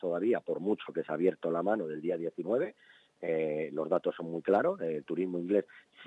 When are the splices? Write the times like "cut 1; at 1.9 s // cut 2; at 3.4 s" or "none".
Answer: none